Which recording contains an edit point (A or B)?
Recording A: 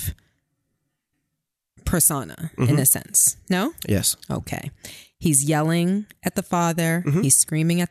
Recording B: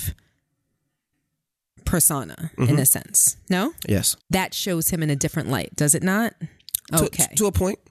B